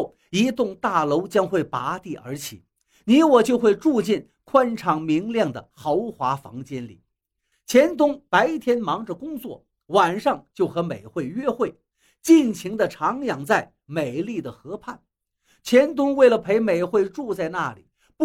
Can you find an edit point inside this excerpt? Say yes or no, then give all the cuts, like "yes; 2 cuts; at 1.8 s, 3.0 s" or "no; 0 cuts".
yes; 1 cut; at 7.5 s